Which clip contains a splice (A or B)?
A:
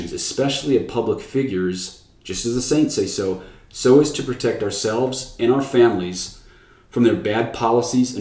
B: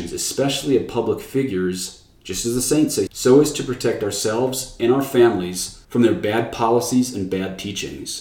B